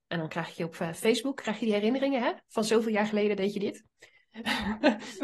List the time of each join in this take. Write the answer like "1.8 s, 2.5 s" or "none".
none